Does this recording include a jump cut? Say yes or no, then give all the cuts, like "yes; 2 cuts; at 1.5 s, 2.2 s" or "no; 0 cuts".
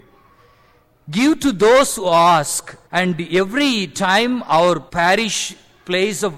yes; 2 cuts; at 2.8 s, 4.9 s